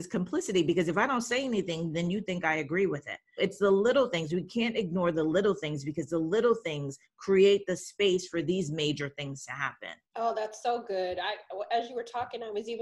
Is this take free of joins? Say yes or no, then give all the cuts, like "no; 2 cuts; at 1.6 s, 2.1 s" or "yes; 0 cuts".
no; 2 cuts; at 3.4 s, 10.0 s